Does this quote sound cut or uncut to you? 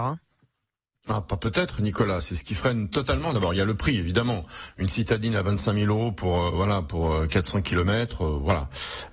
uncut